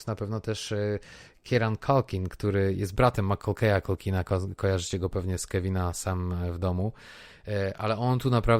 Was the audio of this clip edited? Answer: no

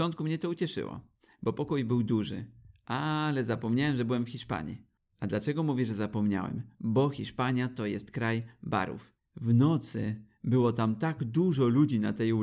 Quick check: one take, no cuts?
yes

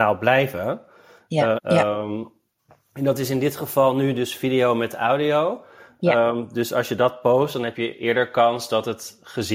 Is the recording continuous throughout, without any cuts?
no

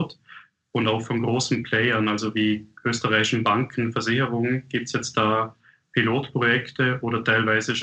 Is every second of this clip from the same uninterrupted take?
yes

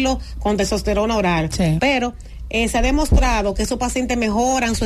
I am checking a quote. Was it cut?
yes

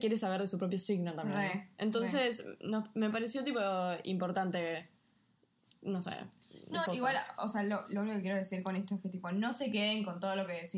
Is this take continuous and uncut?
no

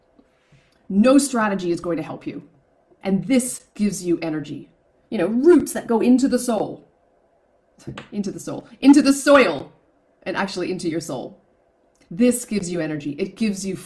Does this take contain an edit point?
yes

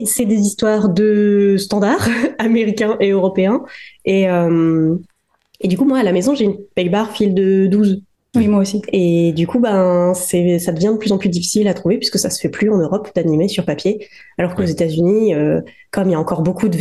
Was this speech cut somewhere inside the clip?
no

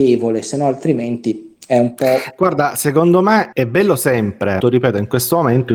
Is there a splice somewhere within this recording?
yes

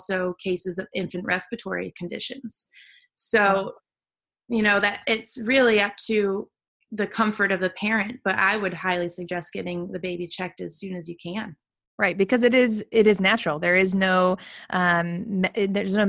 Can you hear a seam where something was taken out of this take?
no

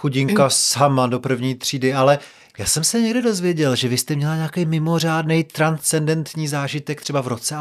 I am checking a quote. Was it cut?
no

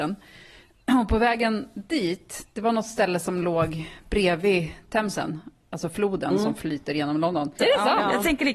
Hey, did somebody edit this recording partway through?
yes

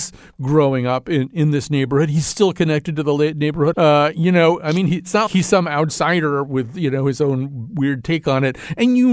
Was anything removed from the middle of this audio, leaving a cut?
yes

